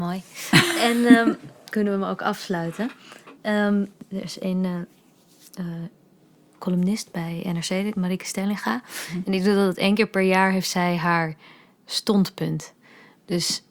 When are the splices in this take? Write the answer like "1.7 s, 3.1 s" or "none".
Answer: none